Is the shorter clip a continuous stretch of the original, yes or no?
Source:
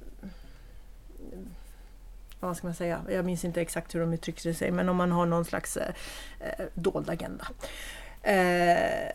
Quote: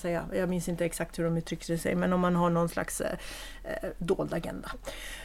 yes